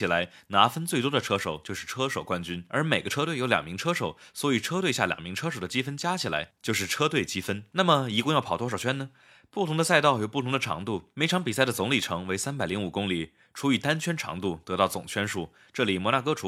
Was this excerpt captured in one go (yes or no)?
no